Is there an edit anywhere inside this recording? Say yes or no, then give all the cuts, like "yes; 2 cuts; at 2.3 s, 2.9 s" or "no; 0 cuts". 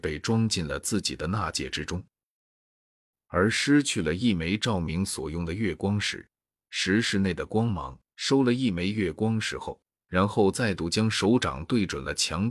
yes; 2 cuts; at 8.1 s, 10.0 s